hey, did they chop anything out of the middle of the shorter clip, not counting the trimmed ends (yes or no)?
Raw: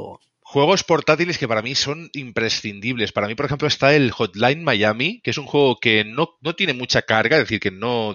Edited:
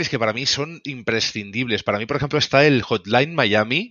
no